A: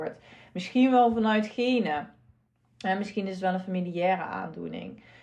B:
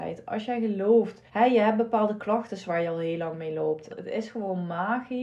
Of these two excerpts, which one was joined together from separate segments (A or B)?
B